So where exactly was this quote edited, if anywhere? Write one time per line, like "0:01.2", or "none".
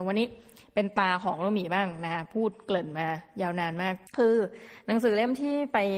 0:04.1